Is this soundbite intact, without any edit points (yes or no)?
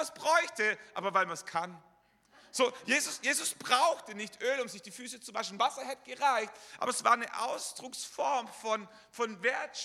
yes